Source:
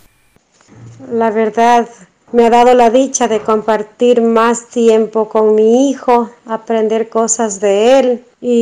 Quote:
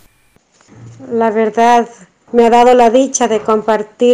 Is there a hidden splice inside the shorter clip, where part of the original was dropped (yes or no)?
no